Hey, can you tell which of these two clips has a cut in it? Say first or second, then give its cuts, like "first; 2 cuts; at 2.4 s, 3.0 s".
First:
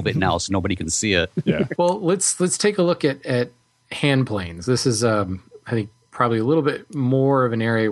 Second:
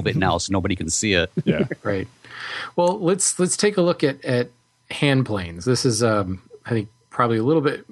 first; 1 cut; at 1.8 s